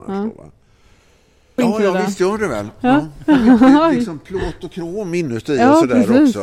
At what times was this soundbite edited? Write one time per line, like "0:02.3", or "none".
0:01.6